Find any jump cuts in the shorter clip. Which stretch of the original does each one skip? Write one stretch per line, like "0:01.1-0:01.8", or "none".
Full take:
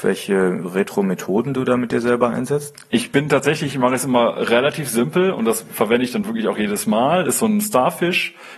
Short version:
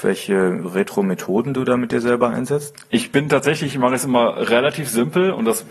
none